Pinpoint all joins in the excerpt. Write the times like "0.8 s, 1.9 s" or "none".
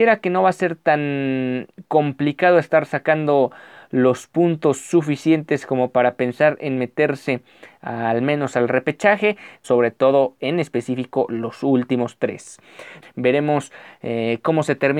9.6 s, 13.0 s